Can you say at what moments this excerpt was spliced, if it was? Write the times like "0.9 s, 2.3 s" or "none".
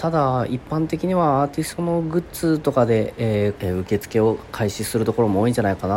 3.6 s